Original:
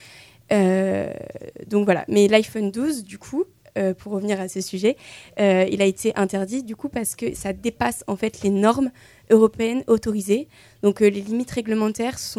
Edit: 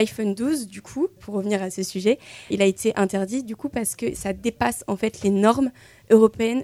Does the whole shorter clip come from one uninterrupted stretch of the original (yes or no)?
no